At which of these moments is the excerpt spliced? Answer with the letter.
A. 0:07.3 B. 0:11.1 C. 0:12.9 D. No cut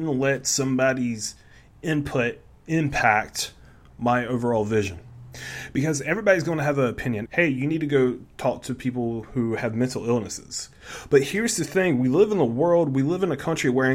A